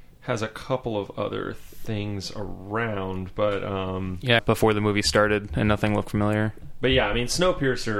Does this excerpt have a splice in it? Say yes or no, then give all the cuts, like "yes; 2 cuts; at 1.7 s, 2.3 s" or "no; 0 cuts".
yes; 1 cut; at 4.4 s